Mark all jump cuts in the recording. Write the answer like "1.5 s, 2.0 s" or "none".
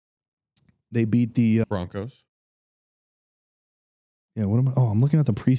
1.6 s